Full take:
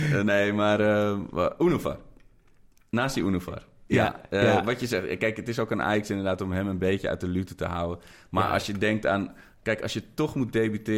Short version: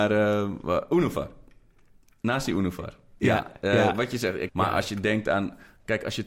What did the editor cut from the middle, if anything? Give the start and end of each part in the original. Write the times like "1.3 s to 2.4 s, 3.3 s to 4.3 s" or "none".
5.2 s to 8.3 s